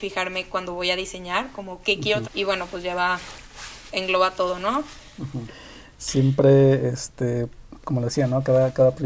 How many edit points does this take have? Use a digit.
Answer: 3